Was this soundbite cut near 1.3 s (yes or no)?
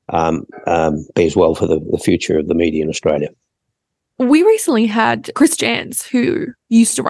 no